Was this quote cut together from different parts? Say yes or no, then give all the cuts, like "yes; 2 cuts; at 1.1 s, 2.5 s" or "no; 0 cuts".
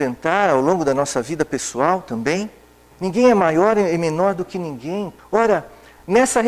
yes; 2 cuts; at 2.9 s, 5.2 s